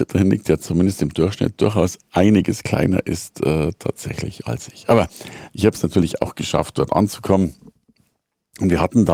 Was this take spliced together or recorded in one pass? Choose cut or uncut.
uncut